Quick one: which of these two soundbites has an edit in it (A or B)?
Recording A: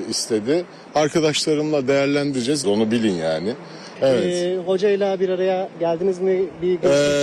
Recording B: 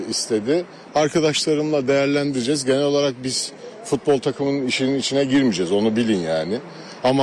A